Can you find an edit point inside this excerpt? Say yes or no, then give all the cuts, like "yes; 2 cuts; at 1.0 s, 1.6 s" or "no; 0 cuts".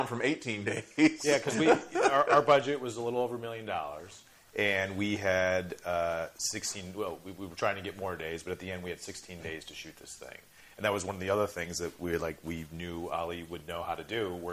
no; 0 cuts